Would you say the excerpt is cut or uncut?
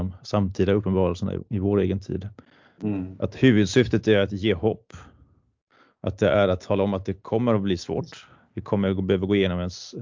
uncut